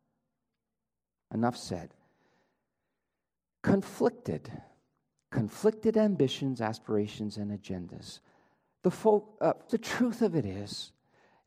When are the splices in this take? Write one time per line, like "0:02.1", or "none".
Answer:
0:09.7